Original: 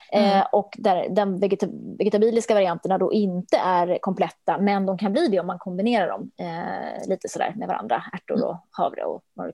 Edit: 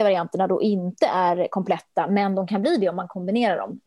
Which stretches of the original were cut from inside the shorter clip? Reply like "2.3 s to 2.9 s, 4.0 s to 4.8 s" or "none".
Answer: none